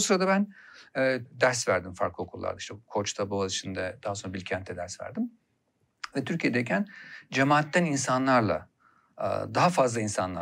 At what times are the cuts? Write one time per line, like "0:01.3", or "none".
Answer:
0:01.3